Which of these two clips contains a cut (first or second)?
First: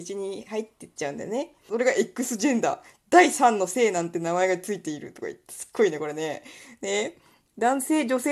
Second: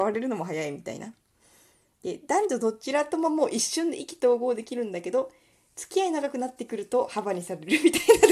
first